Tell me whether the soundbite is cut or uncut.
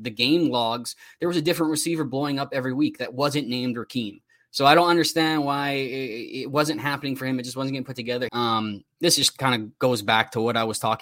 cut